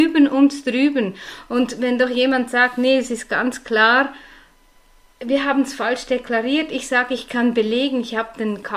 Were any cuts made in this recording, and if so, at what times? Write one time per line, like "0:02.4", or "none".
none